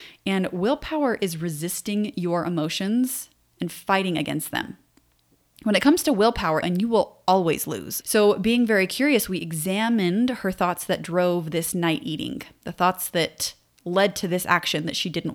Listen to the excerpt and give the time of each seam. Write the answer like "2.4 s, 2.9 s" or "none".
6.6 s, 8.0 s